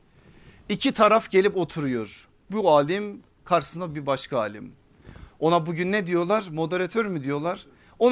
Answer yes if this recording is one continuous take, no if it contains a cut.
no